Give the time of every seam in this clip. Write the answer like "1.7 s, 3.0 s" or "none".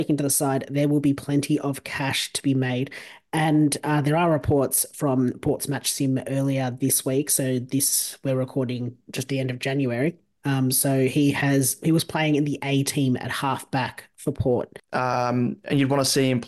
14.8 s